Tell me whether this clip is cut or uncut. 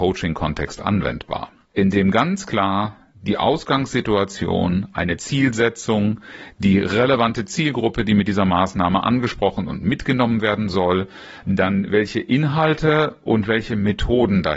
cut